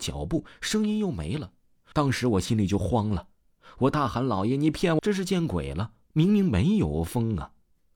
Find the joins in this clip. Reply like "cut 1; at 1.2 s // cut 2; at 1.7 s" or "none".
cut 1; at 1.9 s // cut 2; at 5.0 s